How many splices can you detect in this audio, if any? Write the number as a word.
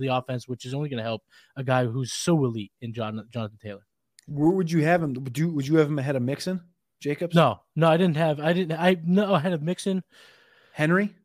zero